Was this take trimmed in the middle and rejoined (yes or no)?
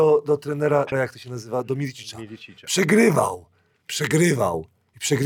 yes